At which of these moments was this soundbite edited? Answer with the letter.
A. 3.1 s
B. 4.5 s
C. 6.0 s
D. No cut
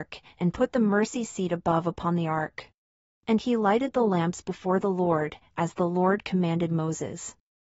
A